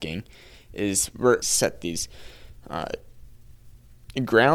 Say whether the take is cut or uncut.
cut